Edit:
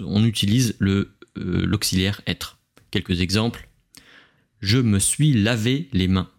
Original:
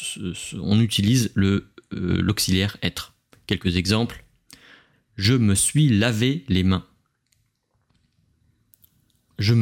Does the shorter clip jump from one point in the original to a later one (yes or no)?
no